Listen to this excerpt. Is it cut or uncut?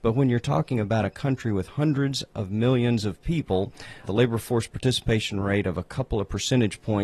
cut